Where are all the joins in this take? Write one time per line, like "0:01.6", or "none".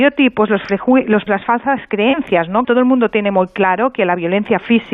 0:01.3
0:02.6